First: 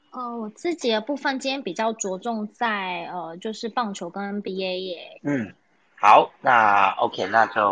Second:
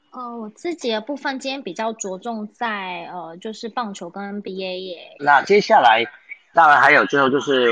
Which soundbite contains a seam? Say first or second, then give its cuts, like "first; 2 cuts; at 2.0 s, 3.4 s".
second; 2 cuts; at 5.2 s, 6.5 s